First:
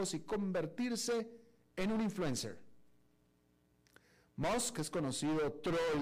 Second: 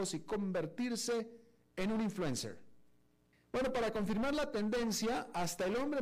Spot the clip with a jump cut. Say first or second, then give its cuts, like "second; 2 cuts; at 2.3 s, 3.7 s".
second; 1 cut; at 3.3 s